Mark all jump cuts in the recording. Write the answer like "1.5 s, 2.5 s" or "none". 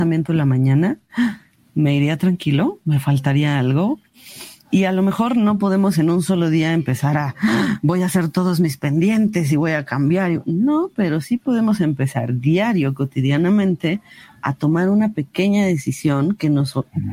1.6 s